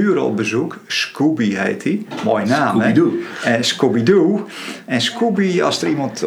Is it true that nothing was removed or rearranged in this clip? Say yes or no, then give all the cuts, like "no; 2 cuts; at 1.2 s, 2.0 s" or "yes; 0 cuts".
yes; 0 cuts